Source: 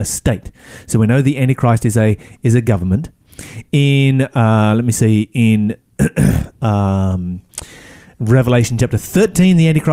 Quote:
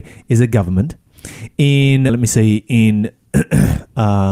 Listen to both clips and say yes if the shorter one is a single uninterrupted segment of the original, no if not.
no